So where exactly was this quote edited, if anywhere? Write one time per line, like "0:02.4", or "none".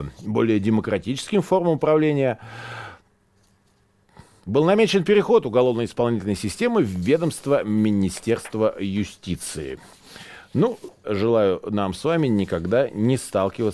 0:11.0